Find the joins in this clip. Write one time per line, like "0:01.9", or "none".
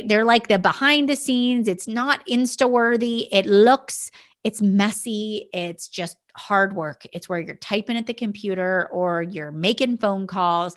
none